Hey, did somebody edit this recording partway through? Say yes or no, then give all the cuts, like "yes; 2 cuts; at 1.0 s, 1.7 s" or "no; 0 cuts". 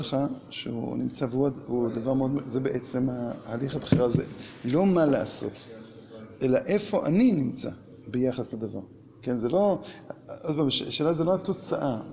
no; 0 cuts